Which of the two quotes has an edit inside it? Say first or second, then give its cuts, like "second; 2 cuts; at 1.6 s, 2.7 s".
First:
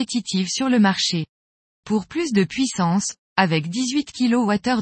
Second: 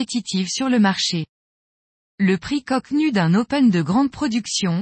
first; 2 cuts; at 1.7 s, 3.3 s